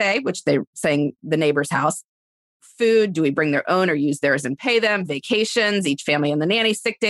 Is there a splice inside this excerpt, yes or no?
no